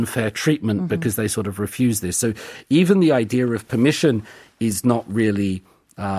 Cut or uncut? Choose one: uncut